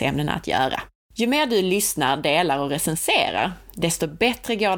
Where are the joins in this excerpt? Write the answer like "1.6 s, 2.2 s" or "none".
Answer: 0.9 s